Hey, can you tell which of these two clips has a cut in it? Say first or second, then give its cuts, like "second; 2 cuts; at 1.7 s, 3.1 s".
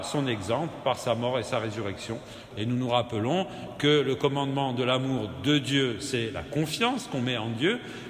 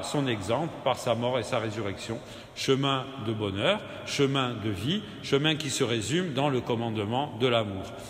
first; 1 cut; at 2.5 s